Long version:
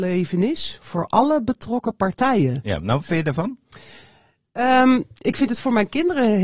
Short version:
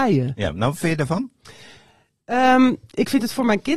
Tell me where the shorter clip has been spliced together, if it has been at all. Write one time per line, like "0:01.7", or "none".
none